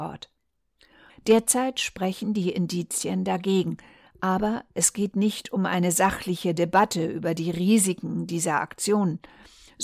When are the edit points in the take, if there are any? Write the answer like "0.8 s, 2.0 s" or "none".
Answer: 1.1 s

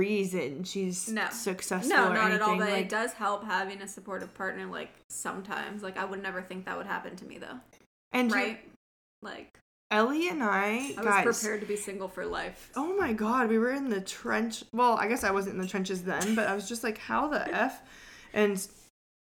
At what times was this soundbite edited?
12.7 s

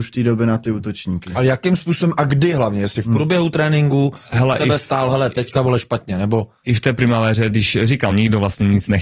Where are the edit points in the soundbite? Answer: 8.1 s

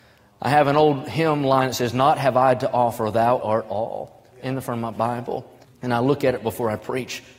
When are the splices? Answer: 3.4 s, 5.6 s

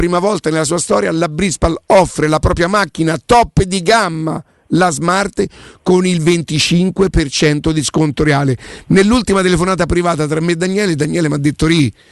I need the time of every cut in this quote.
none

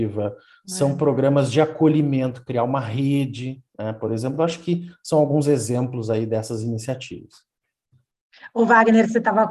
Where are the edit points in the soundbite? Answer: none

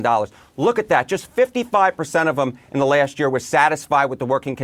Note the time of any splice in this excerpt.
none

